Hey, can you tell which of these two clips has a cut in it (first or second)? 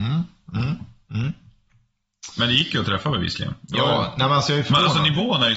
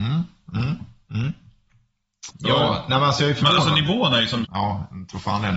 second